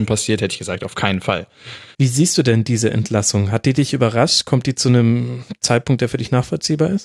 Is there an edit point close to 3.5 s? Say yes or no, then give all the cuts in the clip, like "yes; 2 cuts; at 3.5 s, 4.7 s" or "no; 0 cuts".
no; 1 cut; at 1.9 s